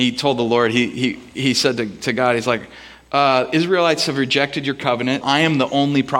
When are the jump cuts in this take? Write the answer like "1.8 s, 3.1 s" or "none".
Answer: 5.2 s